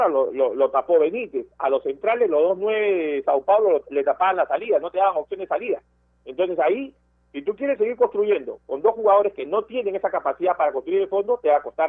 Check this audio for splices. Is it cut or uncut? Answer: uncut